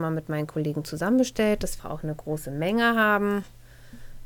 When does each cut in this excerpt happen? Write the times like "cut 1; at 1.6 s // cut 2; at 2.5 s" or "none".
cut 1; at 1.8 s